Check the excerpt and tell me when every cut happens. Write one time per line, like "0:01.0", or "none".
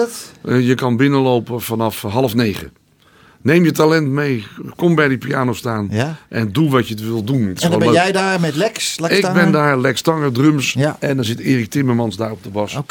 none